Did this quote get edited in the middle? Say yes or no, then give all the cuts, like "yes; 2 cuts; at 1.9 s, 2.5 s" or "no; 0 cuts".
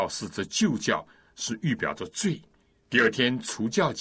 yes; 1 cut; at 2.8 s